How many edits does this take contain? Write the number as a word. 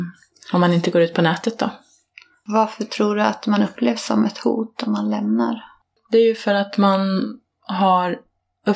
zero